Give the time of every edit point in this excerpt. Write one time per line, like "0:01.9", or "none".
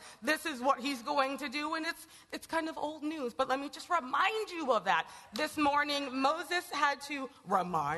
none